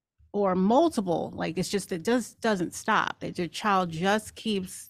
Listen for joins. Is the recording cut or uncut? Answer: uncut